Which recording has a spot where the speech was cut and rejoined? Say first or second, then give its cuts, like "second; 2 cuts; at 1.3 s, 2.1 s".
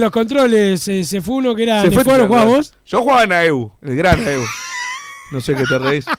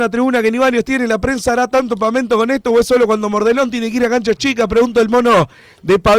first; 1 cut; at 2.1 s